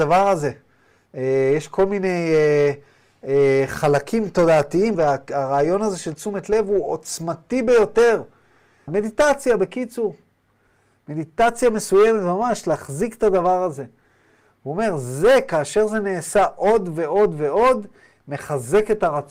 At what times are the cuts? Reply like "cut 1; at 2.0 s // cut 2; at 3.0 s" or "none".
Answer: cut 1; at 4.9 s // cut 2; at 8.9 s